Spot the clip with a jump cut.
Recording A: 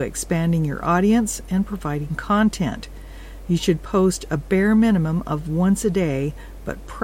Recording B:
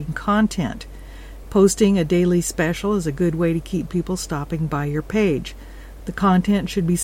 B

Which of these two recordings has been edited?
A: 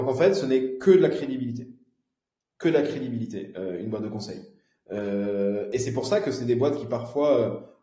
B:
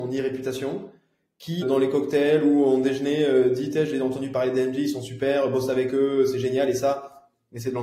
B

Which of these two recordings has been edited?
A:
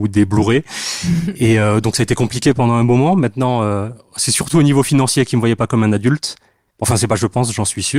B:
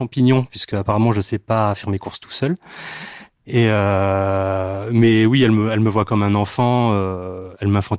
A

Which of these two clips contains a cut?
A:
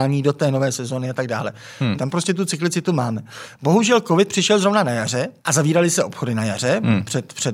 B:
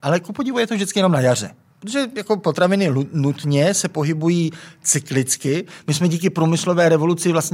A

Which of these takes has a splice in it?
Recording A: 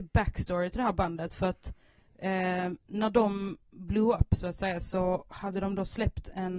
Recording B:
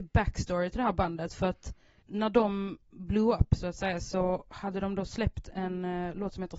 B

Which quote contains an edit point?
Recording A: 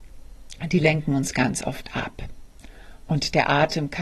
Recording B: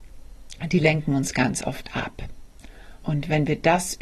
B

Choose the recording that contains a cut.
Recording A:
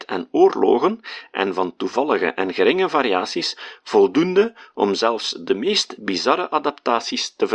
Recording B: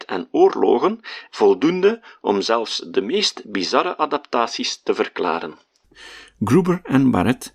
B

